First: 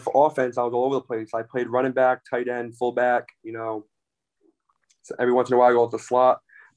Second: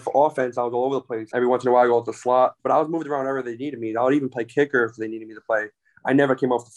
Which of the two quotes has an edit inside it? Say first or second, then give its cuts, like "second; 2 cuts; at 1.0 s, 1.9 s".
second; 2 cuts; at 1.3 s, 2.6 s